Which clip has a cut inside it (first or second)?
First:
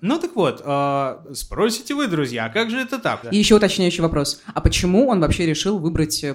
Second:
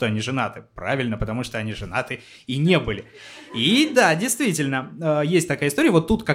first